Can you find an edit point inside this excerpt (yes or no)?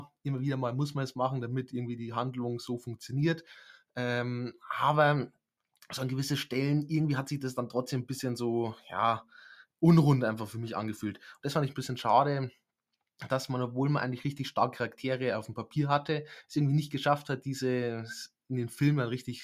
no